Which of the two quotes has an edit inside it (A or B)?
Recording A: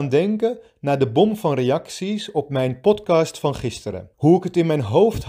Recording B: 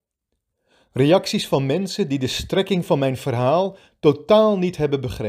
A